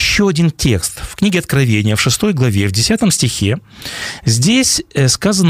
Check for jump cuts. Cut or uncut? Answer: uncut